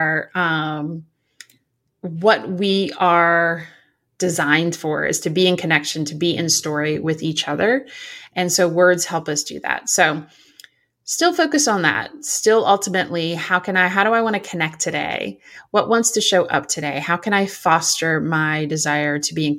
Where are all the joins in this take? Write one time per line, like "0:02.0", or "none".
0:01.8